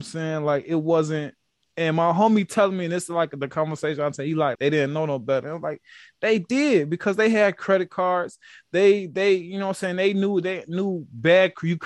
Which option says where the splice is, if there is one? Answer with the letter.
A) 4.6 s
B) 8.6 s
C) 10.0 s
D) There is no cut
A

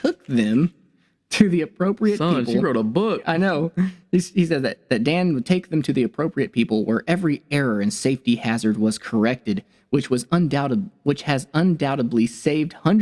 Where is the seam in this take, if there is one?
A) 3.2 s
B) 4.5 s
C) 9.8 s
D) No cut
D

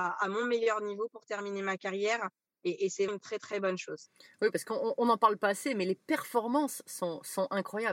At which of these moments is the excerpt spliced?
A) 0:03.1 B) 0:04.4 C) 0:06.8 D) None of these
A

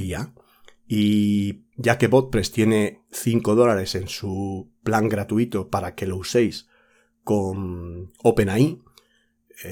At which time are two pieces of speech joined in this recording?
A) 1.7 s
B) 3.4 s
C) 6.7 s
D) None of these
A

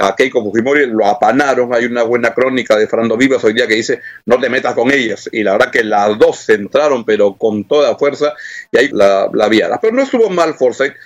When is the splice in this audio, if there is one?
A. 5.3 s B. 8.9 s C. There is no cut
B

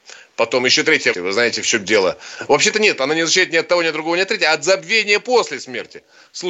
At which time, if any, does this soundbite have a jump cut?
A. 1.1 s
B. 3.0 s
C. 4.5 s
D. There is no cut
A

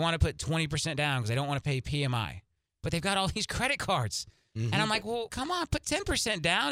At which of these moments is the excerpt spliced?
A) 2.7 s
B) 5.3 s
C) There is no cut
B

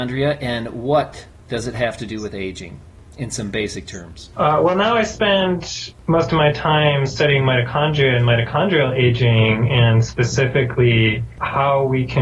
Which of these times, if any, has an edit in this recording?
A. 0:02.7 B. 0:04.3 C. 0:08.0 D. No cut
B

